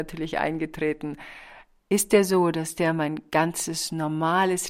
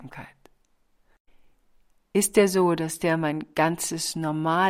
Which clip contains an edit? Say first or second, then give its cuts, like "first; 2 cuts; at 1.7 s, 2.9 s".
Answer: first; 1 cut; at 1.8 s